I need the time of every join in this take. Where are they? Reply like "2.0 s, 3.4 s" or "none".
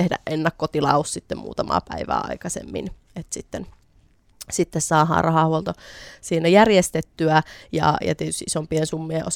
none